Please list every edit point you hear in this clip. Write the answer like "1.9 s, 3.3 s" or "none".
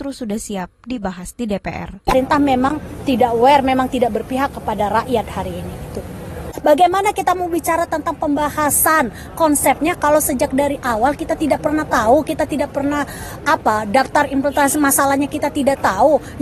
13.4 s